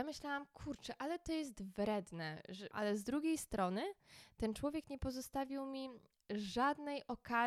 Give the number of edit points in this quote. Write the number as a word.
one